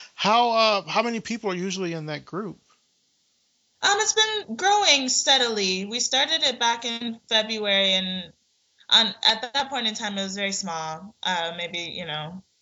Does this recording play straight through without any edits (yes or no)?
yes